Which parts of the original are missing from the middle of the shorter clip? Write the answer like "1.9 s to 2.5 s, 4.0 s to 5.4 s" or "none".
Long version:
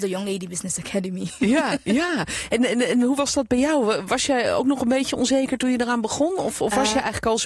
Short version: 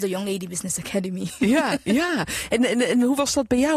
none